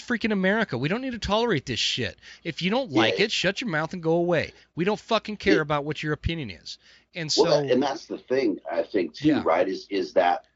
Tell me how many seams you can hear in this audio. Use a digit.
0